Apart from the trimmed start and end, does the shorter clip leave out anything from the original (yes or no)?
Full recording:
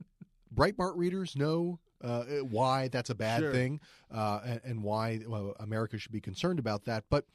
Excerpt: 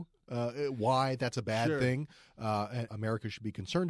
yes